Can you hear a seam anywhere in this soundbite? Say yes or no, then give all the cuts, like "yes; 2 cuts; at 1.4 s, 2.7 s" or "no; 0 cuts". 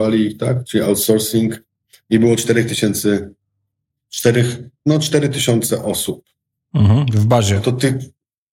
no; 0 cuts